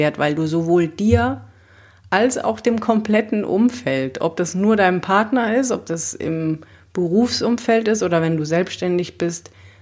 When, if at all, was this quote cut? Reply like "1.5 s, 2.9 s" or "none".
none